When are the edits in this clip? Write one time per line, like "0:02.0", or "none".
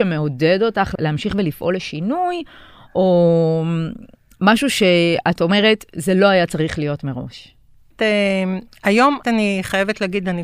0:07.9
0:09.2